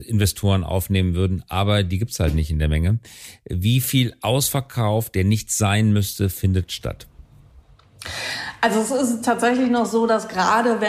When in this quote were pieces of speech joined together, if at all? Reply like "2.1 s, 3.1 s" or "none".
3.3 s